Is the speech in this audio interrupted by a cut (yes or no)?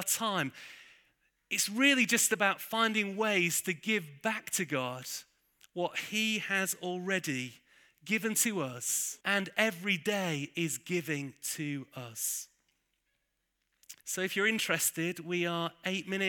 yes